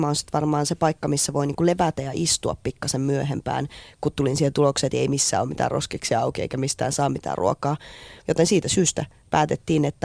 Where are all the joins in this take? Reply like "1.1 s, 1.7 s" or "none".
8.2 s